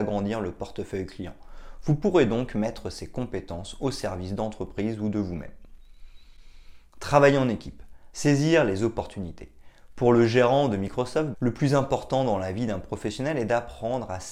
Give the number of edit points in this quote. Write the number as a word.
two